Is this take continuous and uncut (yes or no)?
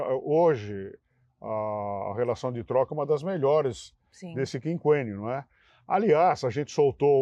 yes